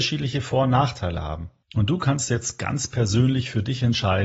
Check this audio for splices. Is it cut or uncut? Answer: uncut